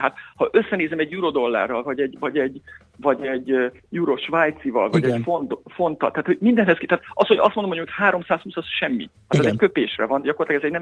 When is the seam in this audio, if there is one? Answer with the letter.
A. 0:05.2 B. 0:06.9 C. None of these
C